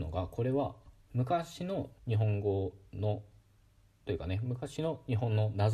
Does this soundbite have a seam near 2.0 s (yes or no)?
yes